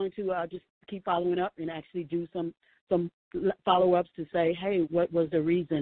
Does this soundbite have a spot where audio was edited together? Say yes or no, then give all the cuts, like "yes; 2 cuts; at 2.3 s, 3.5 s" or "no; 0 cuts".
yes; 1 cut; at 4.8 s